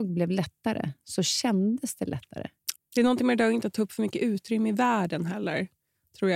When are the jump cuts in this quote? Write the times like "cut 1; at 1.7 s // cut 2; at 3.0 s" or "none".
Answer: cut 1; at 2.7 s